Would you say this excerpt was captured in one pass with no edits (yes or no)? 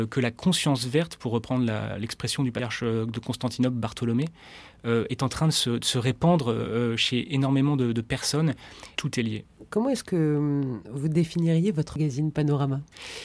no